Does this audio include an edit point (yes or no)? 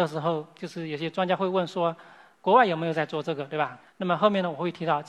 yes